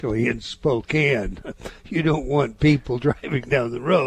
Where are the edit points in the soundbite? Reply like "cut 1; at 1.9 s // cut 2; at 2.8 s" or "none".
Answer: none